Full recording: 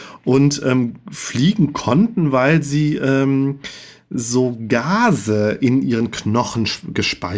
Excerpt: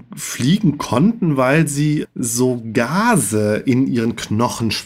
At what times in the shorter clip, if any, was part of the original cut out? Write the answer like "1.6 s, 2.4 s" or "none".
2.0 s